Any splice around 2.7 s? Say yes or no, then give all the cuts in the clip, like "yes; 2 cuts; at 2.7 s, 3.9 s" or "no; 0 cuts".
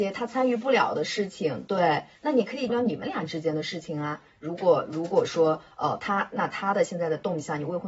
yes; 1 cut; at 2.7 s